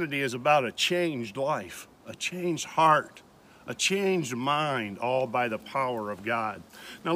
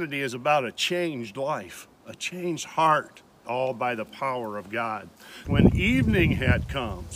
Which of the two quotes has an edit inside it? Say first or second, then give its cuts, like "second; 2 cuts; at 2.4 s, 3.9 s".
second; 2 cuts; at 3.4 s, 5.4 s